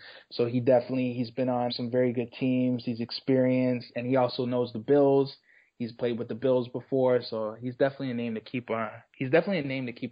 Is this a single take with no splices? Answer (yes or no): no